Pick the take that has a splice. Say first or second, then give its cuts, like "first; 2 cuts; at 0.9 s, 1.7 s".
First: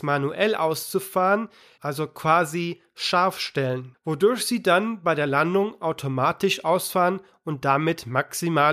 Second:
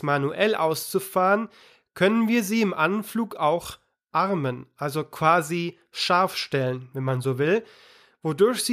first; 2 cuts; at 1.8 s, 3.9 s